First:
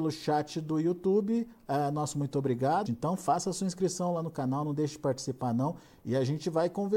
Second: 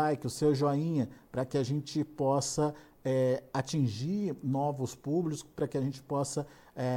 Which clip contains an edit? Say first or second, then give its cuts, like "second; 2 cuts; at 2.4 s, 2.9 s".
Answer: first; 2 cuts; at 2.9 s, 6.0 s